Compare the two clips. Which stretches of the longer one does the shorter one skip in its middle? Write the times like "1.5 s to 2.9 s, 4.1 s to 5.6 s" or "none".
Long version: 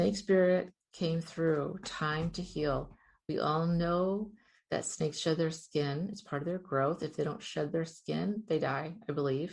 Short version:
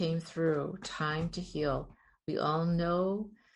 none